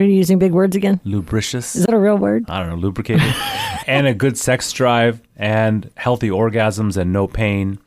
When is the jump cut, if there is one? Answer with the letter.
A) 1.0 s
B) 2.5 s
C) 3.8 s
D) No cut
C